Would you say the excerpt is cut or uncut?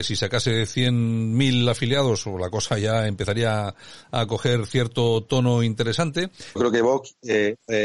cut